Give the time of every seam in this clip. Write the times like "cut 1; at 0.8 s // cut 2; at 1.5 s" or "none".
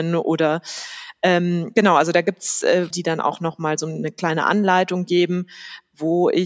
cut 1; at 2.9 s